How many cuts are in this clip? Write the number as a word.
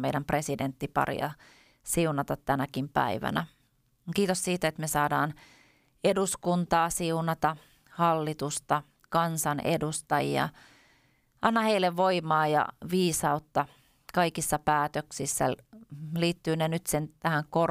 one